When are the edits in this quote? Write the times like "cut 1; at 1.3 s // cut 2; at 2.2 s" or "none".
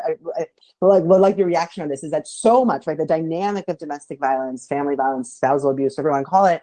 none